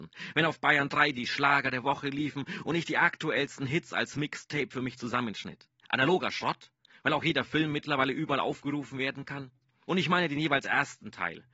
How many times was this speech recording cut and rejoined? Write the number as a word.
two